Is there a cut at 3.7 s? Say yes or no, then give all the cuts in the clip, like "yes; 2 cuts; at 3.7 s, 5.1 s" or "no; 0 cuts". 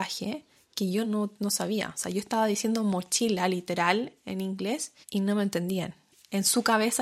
no; 2 cuts; at 1.0 s, 5.0 s